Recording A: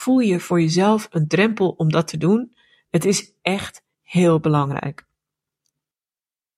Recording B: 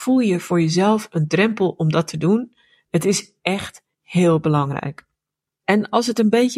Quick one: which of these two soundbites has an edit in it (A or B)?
B